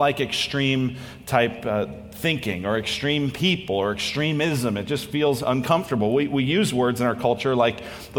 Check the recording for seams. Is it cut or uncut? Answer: uncut